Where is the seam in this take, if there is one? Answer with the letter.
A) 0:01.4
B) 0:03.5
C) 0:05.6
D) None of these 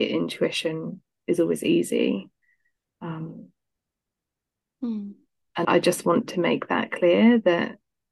C